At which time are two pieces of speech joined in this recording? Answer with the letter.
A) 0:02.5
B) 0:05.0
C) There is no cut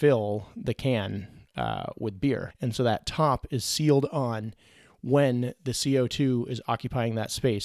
A